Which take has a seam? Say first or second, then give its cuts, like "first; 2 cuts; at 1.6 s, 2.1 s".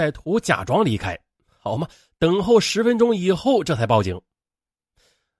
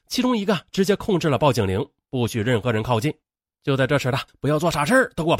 second; 1 cut; at 4.3 s